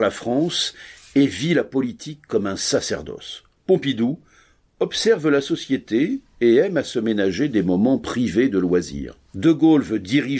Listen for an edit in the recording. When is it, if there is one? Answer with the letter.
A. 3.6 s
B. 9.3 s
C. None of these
B